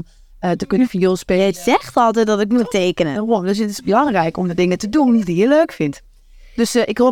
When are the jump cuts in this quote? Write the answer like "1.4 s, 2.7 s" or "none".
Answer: none